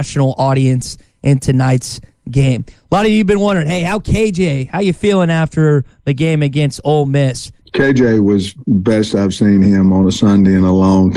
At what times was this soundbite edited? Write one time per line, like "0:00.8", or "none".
0:07.6